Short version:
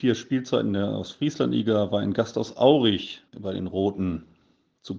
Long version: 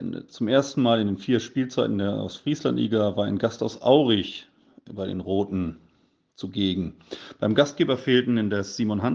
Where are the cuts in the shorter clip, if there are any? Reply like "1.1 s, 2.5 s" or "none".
3.3 s